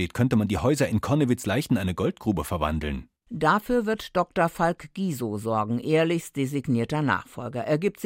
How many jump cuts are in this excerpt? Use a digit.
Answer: 0